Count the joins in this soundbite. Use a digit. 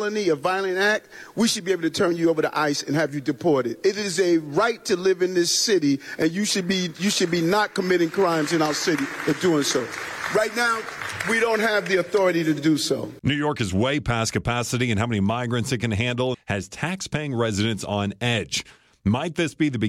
1